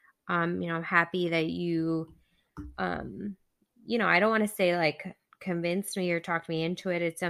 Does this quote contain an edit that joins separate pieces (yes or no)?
no